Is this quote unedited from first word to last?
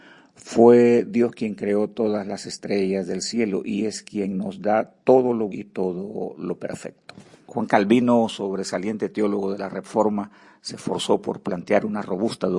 no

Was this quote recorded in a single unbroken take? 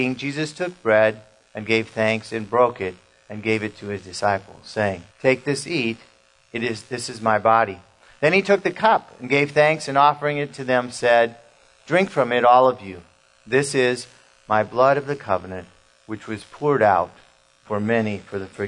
no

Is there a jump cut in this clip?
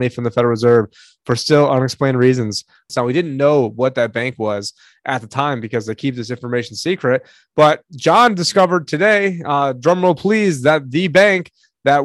yes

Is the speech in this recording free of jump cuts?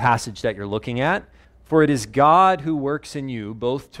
no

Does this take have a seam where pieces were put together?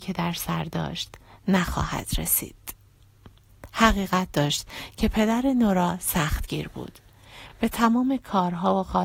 no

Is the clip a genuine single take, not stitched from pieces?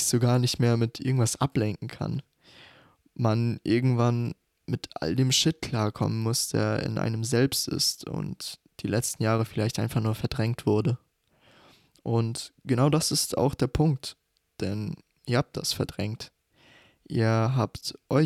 yes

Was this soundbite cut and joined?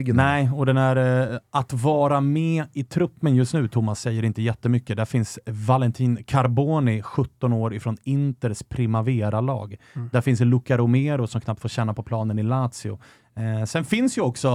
no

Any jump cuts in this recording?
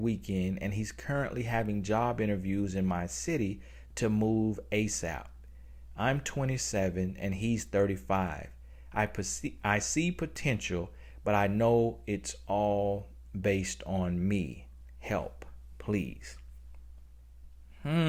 no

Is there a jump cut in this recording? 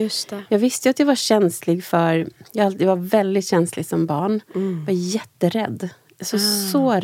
no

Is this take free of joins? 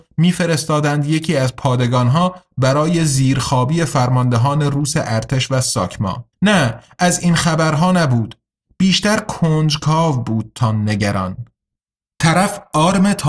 no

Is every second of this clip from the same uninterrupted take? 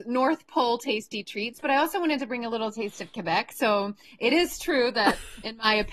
yes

